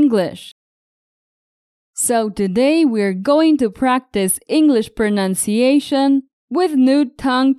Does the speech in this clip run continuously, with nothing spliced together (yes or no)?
yes